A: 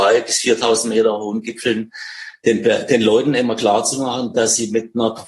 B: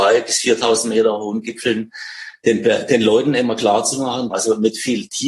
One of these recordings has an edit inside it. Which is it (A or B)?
B